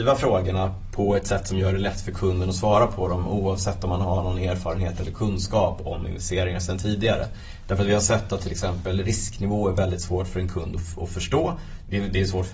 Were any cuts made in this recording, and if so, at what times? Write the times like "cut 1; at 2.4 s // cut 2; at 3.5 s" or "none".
none